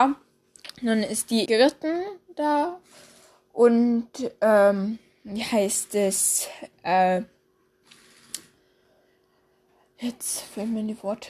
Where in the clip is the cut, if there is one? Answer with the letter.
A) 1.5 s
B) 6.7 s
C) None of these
A